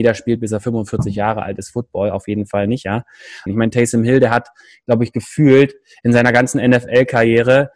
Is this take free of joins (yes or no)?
no